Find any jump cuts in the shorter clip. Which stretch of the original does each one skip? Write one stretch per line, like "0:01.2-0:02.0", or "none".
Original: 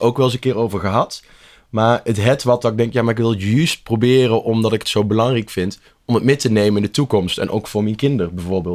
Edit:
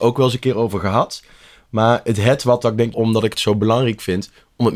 0:02.9-0:04.4